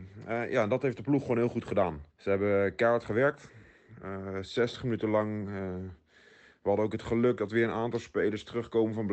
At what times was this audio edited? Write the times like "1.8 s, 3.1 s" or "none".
2.1 s